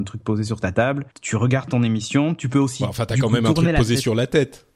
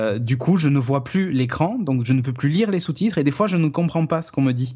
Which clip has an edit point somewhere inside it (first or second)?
first